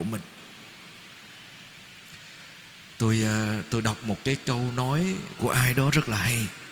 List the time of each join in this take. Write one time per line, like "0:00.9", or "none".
none